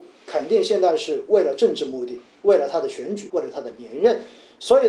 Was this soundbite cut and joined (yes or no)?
yes